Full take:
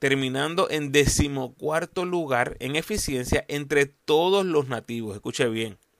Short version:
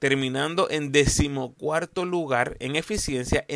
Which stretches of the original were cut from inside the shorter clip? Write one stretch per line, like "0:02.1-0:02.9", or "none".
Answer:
none